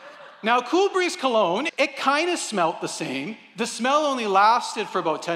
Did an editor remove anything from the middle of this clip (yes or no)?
yes